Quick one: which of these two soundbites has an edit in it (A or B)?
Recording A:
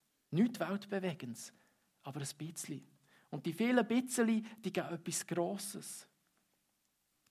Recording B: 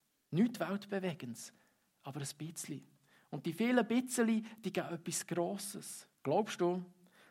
B